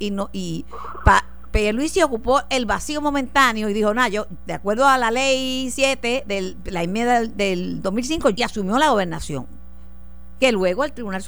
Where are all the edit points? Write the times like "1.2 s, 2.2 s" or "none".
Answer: 8.3 s